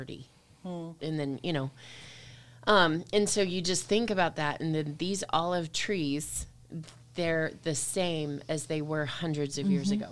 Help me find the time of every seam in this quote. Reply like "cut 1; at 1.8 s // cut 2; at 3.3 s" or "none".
cut 1; at 1.0 s